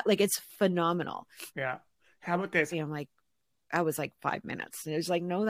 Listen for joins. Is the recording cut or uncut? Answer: cut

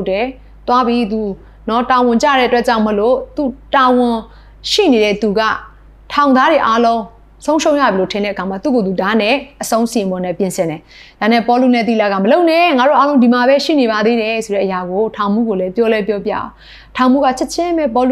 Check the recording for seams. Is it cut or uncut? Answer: uncut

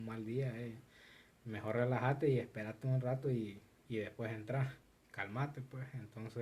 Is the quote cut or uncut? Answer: uncut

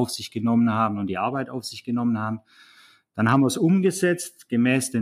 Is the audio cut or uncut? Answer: uncut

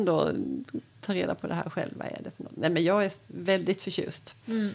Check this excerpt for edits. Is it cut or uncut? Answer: uncut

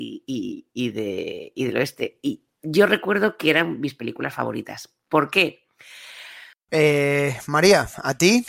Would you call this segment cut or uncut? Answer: cut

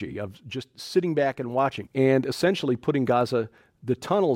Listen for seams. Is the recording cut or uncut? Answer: cut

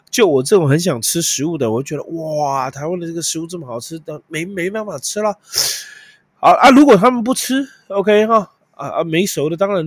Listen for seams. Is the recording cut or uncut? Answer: uncut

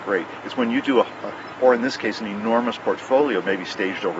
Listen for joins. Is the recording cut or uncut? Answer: cut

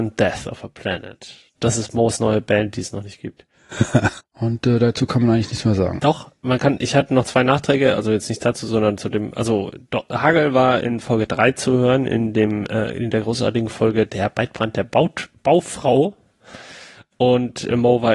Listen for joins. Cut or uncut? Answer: cut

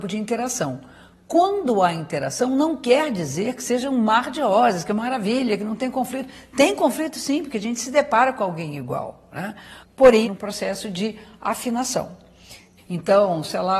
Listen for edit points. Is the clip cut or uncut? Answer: cut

